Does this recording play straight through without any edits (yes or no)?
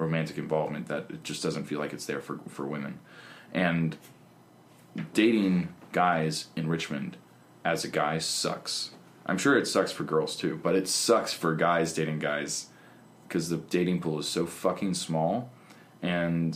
yes